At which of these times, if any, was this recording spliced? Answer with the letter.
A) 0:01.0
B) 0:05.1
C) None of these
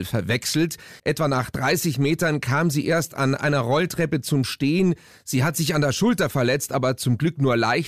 A